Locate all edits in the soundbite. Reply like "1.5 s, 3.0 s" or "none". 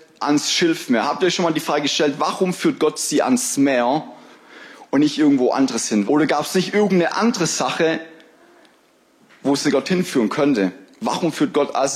6.1 s